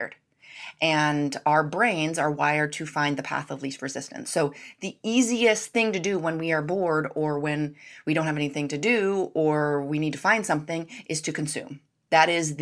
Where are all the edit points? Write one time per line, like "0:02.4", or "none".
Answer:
none